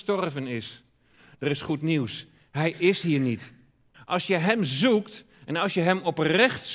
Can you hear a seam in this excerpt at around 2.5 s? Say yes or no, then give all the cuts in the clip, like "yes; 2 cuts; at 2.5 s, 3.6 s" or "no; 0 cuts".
no; 1 cut; at 3.9 s